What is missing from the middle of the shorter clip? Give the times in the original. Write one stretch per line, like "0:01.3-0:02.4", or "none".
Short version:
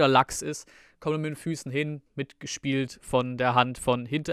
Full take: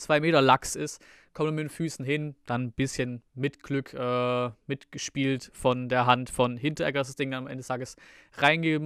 0:02.4-0:04.6